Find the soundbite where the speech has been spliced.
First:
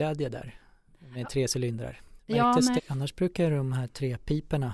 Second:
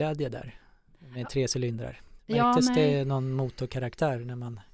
first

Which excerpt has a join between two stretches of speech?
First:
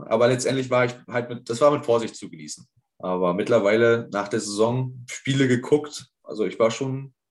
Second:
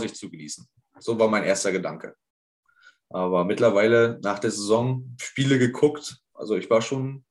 first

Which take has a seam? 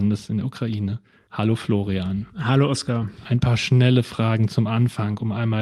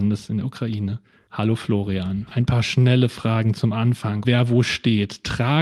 second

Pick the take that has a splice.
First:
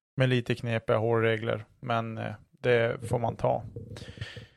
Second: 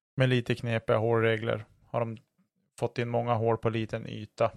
second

